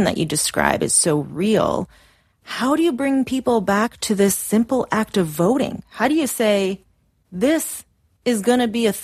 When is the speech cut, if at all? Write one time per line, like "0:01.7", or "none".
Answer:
none

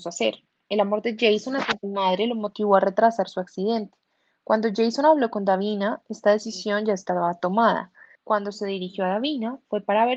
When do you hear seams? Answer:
0:08.2

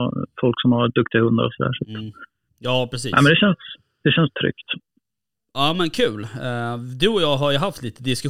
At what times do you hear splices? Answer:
none

